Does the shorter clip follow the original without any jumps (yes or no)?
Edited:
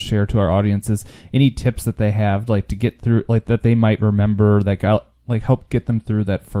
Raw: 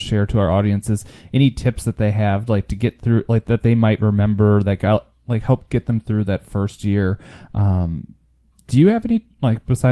yes